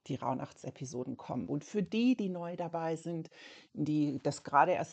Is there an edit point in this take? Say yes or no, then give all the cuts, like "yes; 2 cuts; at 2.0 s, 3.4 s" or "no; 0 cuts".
no; 0 cuts